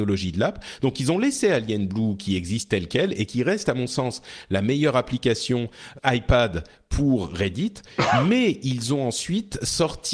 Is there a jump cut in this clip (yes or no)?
yes